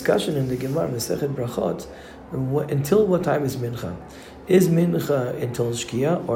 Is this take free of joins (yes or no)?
yes